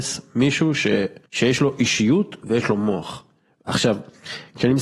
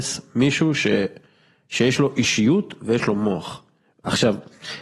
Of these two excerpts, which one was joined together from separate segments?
first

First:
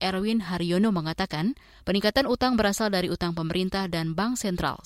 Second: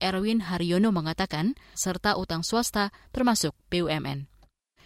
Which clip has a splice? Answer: second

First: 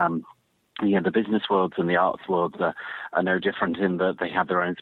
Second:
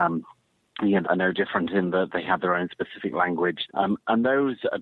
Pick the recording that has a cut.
second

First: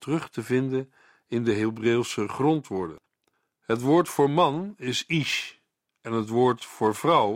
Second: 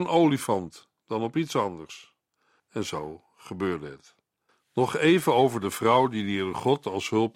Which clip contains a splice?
second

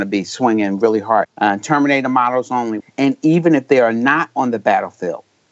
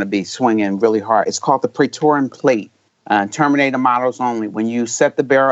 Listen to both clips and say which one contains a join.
first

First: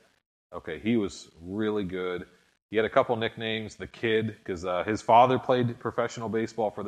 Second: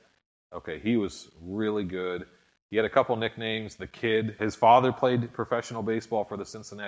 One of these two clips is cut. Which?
second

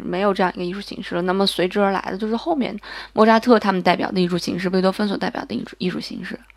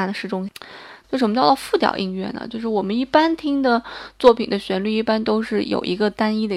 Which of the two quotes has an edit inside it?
second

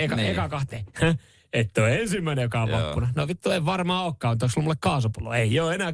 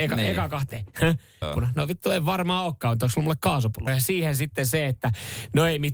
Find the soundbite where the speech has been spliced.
second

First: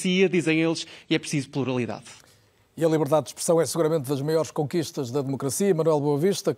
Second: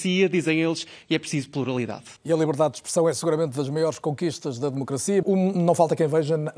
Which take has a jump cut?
second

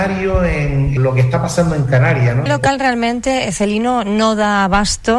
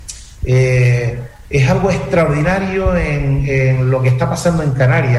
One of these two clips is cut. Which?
first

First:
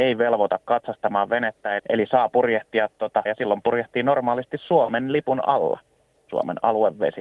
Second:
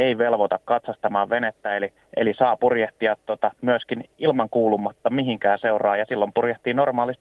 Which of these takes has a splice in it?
first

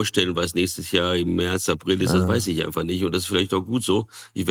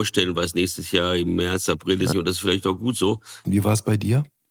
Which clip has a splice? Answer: second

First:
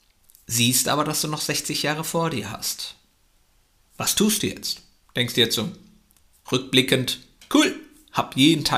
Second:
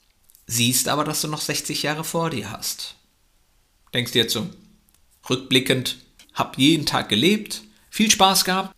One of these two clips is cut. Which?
second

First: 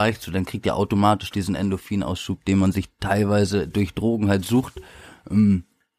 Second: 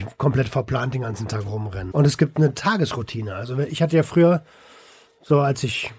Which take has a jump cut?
second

